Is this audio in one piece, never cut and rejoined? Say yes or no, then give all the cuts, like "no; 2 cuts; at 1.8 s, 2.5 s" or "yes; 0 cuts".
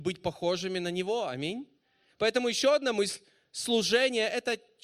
yes; 0 cuts